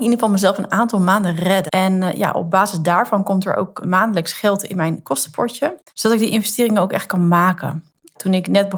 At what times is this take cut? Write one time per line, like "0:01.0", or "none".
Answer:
0:01.7
0:03.8
0:05.9